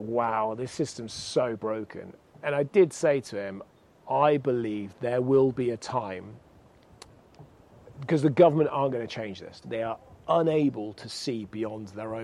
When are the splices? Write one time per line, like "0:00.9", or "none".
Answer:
0:09.6